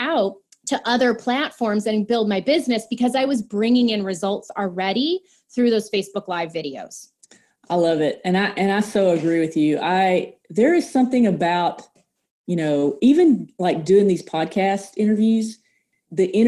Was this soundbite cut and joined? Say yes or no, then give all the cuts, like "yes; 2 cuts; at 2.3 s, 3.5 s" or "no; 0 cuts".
no; 0 cuts